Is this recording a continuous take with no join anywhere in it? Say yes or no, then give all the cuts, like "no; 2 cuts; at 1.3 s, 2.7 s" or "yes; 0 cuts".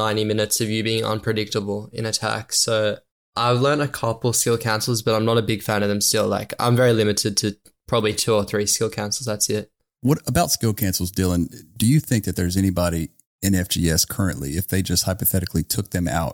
yes; 0 cuts